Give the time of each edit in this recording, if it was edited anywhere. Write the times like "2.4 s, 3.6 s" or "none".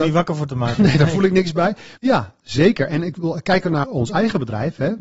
2.0 s, 3.8 s